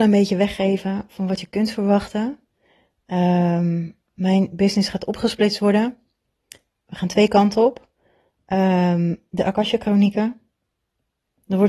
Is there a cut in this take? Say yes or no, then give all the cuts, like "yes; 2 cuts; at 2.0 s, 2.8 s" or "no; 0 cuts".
no; 0 cuts